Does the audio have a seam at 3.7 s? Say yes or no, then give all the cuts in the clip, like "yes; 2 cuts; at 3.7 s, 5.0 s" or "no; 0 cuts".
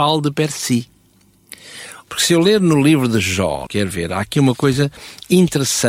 yes; 2 cuts; at 2.1 s, 3.7 s